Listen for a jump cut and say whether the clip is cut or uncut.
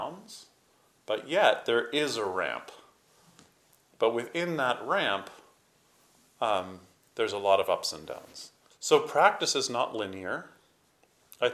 cut